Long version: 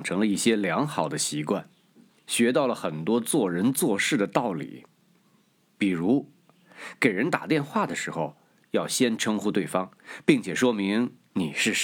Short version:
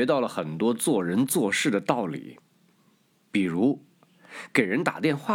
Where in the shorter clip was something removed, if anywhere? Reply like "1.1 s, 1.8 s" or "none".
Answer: none

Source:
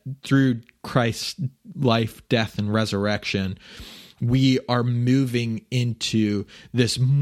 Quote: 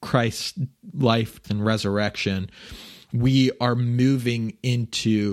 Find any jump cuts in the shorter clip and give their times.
1.4 s

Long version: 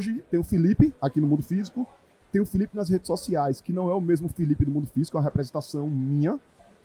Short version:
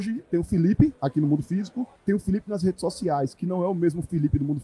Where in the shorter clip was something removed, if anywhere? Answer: 2.0 s

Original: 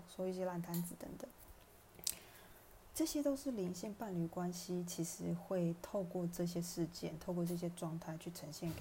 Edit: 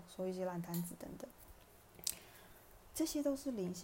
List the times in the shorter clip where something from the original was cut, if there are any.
none

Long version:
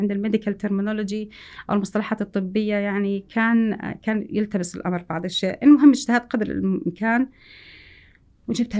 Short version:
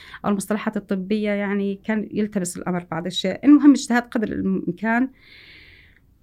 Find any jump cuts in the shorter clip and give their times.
1.8 s

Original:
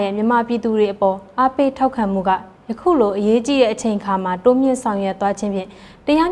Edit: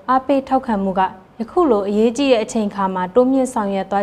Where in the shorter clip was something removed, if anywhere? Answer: none

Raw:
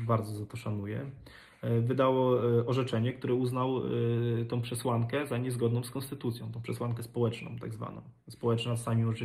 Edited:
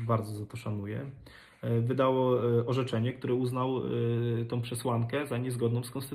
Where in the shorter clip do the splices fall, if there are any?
none

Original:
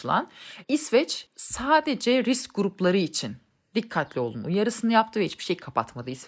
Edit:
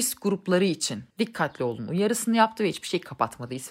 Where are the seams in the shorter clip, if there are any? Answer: 1.1 s

